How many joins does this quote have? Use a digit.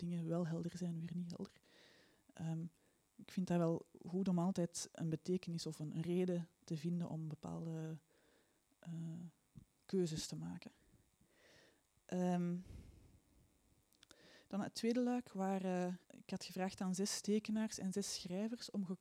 2